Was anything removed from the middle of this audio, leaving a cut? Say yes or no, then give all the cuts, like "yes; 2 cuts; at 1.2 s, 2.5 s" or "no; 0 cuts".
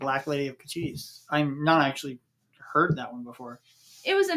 no; 0 cuts